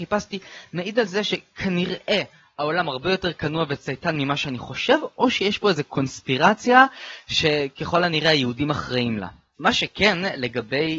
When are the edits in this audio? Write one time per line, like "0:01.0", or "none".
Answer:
0:09.5